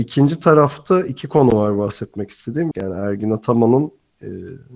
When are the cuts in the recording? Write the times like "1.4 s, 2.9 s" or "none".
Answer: 2.7 s